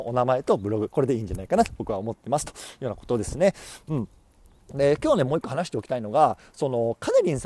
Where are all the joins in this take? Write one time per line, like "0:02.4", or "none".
none

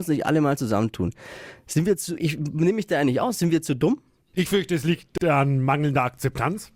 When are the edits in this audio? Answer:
0:02.2
0:04.3

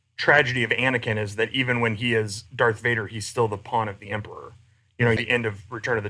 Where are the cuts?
0:05.2

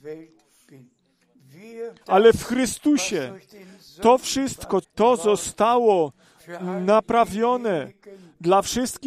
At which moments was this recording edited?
0:02.0
0:04.8

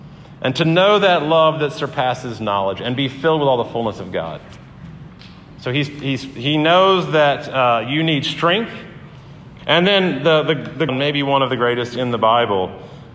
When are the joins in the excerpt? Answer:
0:09.6
0:10.9

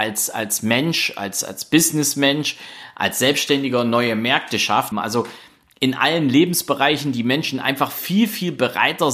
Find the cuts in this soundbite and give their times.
0:04.9

